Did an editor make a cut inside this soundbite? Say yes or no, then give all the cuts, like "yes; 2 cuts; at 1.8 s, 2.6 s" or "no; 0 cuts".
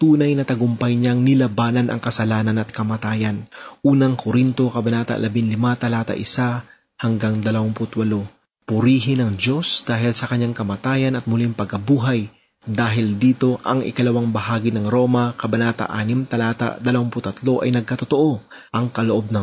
no; 0 cuts